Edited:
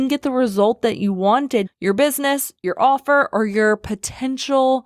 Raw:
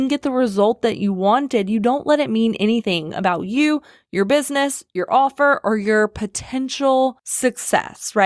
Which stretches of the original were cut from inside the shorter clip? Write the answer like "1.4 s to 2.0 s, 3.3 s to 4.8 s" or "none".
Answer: 1.7 s to 4.0 s